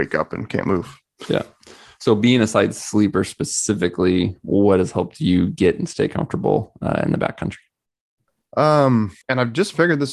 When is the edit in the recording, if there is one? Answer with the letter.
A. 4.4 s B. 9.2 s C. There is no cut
B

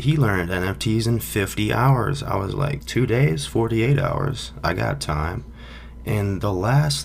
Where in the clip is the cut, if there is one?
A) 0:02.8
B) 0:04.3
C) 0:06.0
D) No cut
A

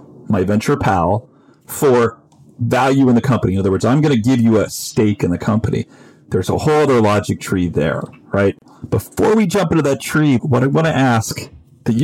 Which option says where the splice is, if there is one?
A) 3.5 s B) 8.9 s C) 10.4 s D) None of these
C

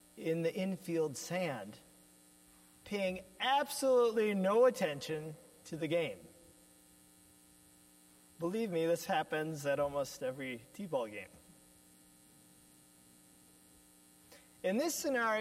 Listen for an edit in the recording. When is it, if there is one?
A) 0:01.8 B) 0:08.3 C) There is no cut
B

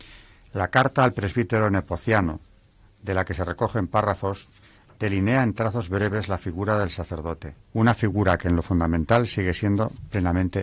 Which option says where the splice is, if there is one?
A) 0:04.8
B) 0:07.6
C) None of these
B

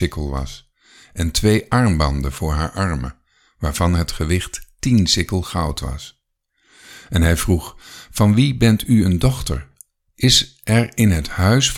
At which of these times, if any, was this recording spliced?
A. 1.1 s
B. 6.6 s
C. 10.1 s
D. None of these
C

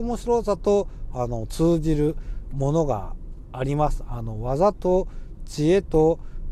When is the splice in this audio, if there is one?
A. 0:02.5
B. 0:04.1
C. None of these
A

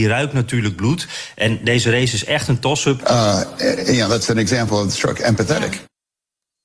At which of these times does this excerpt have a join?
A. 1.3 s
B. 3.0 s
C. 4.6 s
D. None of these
B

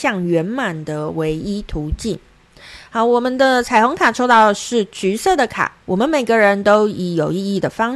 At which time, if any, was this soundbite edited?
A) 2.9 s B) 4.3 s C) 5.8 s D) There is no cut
C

